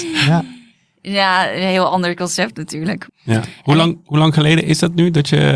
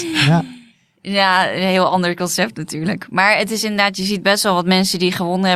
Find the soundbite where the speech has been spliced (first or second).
first